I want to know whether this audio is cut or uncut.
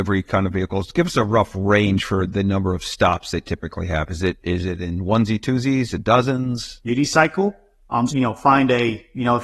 cut